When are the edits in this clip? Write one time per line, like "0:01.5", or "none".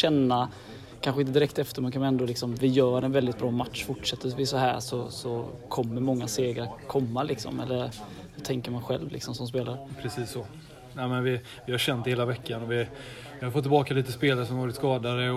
none